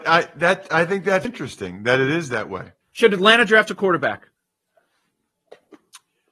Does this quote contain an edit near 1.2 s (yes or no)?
yes